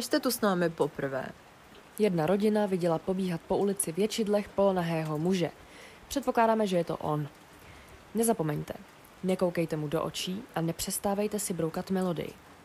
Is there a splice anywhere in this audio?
yes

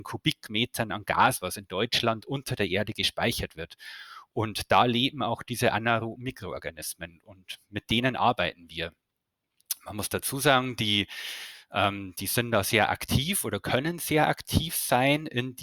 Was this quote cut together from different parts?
yes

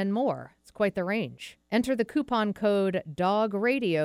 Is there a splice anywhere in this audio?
yes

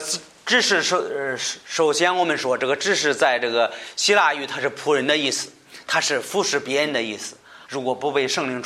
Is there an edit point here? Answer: yes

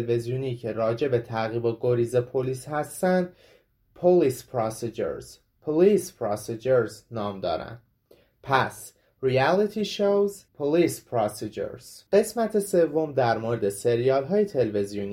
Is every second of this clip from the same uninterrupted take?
no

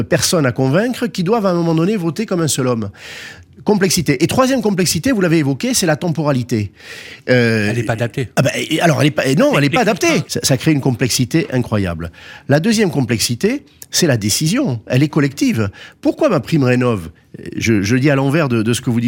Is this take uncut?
no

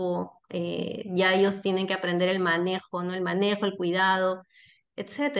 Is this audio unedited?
yes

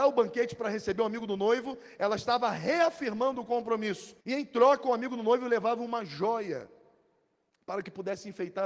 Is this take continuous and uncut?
no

